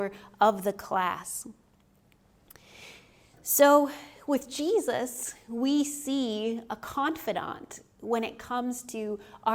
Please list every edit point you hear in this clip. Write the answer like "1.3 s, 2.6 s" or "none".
none